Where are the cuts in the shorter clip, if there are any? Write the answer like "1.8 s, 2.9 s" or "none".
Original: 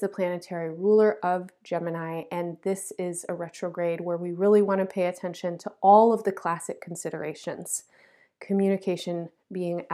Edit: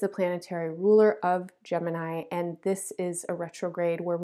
none